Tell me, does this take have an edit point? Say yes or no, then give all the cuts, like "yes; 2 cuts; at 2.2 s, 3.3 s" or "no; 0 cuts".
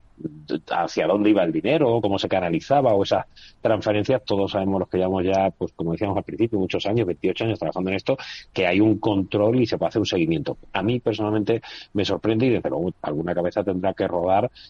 no; 0 cuts